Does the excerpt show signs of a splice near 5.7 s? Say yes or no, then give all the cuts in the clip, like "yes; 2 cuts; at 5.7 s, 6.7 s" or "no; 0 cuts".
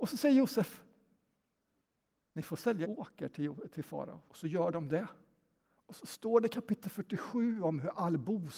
no; 2 cuts; at 2.8 s, 4.3 s